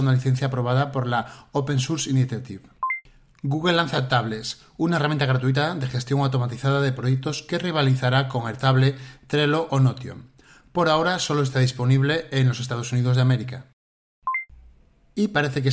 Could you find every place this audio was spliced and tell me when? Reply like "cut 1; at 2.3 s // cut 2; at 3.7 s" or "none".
none